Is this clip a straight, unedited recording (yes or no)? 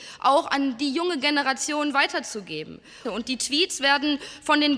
no